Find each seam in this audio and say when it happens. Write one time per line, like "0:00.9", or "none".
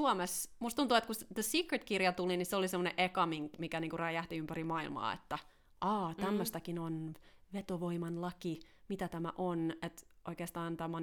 none